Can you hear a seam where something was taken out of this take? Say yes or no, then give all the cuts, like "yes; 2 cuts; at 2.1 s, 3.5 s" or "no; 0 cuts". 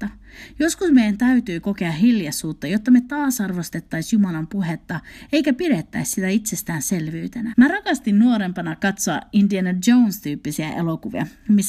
yes; 1 cut; at 7.5 s